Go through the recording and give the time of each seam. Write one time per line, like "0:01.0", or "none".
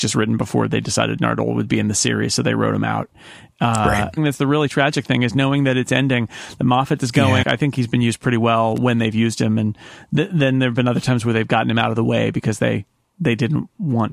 0:04.2
0:07.4